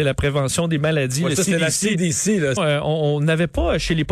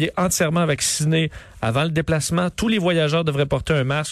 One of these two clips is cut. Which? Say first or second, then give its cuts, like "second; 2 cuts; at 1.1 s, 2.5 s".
first; 1 cut; at 2.6 s